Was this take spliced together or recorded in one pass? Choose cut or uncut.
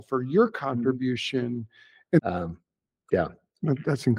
cut